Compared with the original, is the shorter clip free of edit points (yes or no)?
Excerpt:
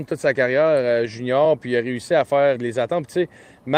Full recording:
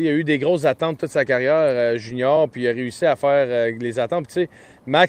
no